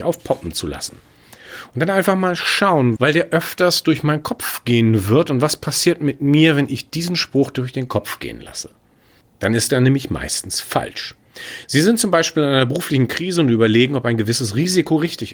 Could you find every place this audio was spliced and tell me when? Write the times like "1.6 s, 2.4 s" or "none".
3.0 s, 9.2 s

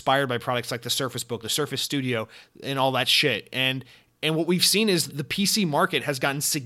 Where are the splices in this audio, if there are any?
1.4 s, 5.1 s

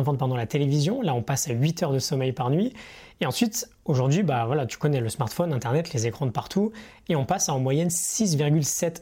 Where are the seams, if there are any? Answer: none

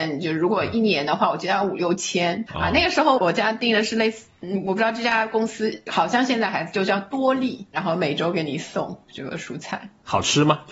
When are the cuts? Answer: 3.2 s

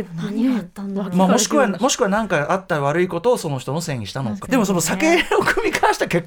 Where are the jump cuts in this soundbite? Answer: 4.4 s

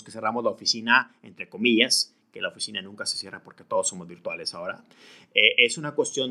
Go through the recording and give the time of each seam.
none

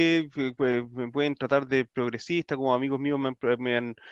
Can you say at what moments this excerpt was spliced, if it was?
none

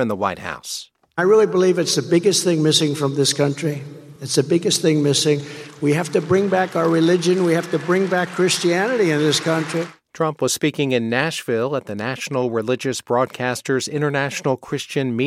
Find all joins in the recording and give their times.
none

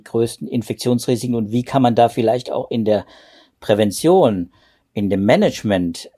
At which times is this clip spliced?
none

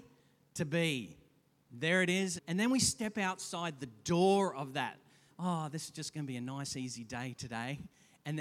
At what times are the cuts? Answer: 2.4 s, 5.3 s

